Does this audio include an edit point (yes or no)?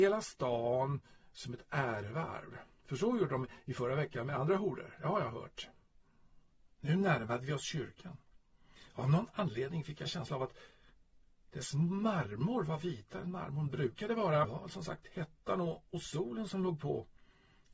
yes